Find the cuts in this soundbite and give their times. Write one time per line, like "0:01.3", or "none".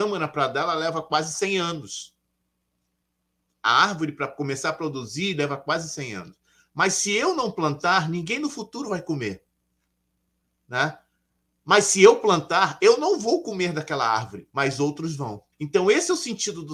0:15.5